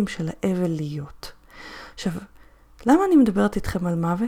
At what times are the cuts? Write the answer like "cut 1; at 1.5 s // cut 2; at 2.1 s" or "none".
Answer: none